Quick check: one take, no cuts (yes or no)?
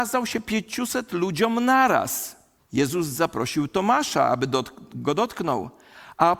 no